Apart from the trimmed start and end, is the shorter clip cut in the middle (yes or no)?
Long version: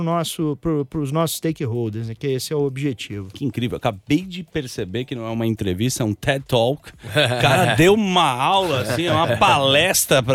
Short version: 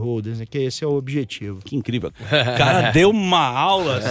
yes